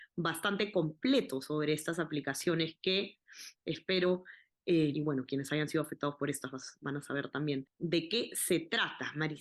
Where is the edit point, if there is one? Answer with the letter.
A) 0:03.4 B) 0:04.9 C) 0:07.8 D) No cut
B